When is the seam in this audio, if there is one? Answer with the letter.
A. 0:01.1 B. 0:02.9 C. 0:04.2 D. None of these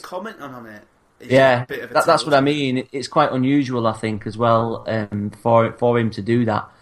D